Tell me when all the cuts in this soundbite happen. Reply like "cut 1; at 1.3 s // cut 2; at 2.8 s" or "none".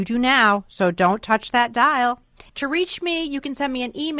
cut 1; at 2.5 s